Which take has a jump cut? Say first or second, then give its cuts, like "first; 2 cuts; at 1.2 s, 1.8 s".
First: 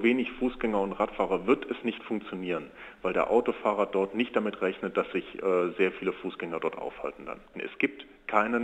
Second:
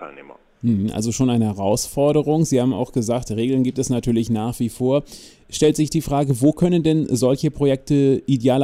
first; 1 cut; at 7.5 s